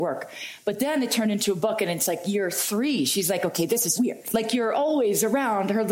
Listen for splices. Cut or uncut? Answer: cut